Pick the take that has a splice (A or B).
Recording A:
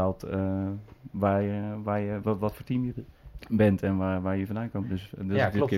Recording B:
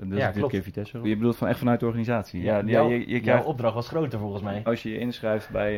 B